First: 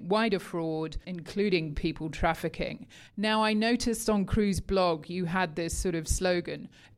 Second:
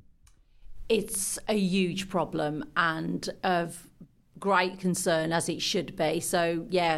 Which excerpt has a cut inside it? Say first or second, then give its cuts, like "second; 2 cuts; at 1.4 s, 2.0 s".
first; 1 cut; at 1.0 s